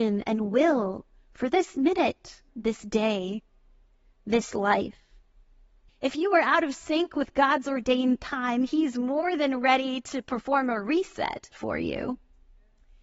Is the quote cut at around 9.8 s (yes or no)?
no